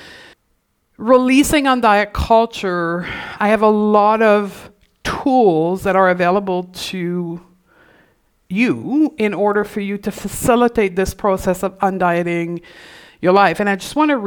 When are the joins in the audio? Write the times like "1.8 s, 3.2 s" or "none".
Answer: none